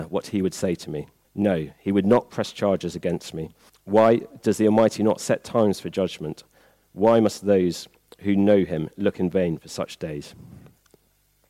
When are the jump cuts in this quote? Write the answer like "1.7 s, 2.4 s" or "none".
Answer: 1.2 s, 3.7 s